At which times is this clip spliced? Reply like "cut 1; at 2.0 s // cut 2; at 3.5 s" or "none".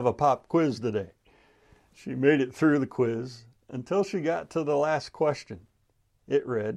none